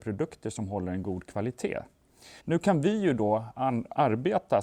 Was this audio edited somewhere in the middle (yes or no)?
yes